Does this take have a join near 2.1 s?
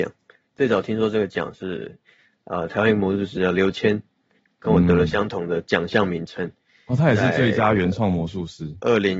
no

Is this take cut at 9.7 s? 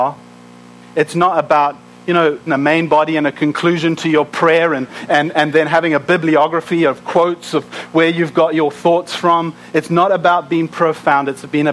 no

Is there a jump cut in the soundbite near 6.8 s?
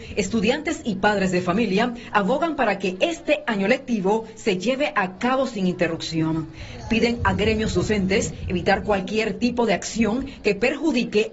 no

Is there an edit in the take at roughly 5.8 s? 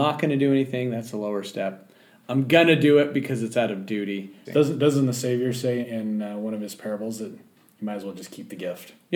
yes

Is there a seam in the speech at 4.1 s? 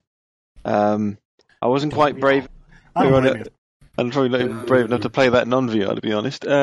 no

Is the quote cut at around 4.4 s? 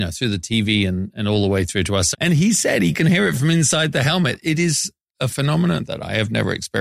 no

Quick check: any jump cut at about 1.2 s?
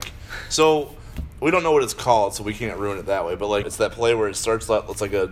no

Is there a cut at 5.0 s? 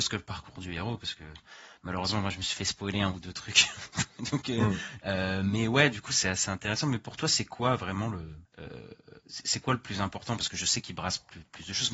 yes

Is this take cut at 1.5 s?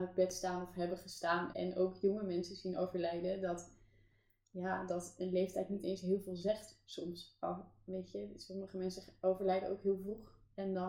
yes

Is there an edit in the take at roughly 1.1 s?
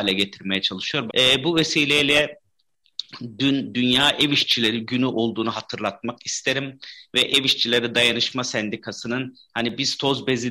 yes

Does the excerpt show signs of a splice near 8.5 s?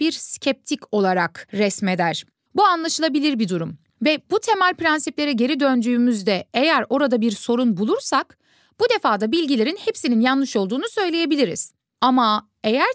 no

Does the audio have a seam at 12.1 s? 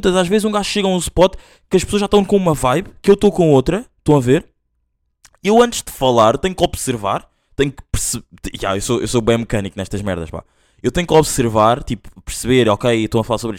no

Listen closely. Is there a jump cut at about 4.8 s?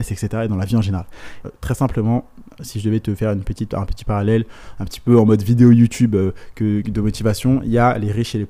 no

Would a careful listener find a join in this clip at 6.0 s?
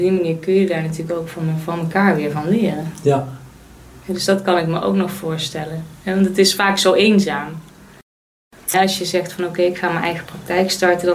no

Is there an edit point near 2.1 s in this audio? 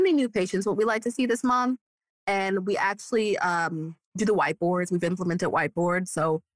no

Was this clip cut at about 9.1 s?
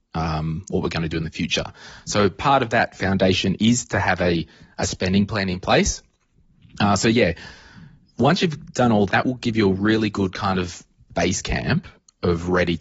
yes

